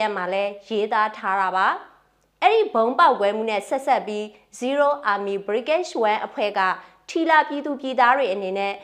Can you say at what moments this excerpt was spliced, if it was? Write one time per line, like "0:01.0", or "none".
none